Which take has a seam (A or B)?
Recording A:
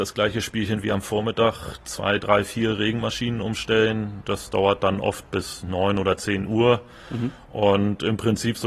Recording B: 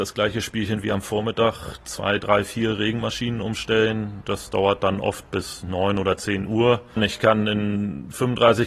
B